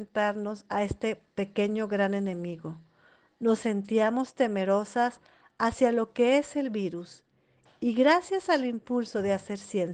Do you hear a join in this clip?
no; 0 cuts

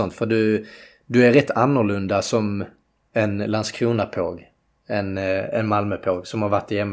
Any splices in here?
no; 0 cuts

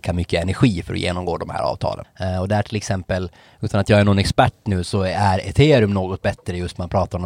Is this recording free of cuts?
no; 2 cuts; at 2.0 s, 4.8 s

